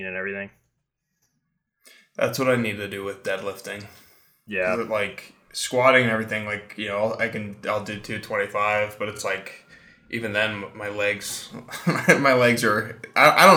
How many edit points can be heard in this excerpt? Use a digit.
0